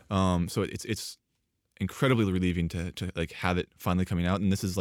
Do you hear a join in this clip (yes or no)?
no